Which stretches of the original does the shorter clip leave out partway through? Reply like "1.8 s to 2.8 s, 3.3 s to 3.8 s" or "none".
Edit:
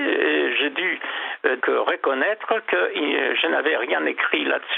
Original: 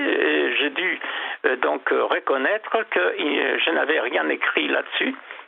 1.6 s to 1.8 s